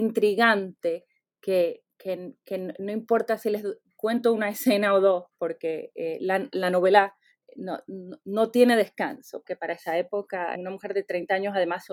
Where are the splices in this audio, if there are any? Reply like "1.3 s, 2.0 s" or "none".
9.4 s, 10.5 s